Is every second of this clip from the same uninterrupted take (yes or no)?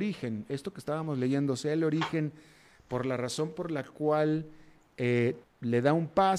no